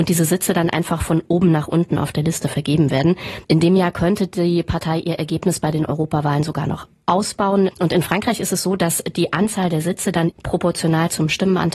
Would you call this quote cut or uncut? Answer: cut